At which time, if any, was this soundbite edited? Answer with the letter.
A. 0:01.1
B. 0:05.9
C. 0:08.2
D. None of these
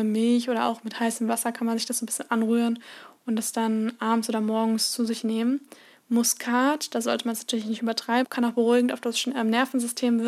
C